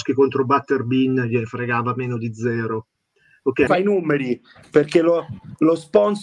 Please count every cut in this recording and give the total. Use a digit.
1